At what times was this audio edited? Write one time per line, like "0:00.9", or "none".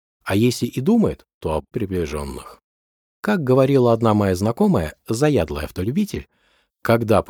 0:01.7